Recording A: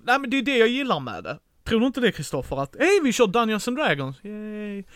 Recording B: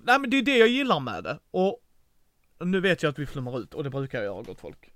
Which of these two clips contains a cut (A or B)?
A